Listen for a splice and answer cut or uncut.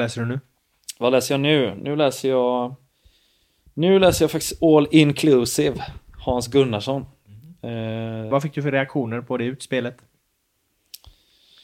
cut